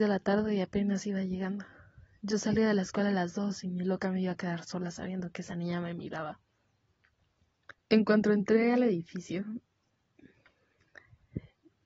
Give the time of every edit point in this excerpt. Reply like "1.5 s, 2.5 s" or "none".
7.8 s